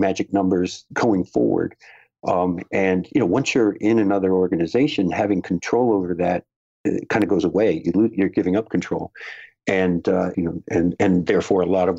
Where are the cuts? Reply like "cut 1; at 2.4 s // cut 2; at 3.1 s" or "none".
cut 1; at 10.3 s